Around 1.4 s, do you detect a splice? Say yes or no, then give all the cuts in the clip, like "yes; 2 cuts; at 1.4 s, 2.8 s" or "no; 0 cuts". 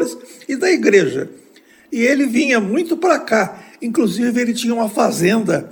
no; 0 cuts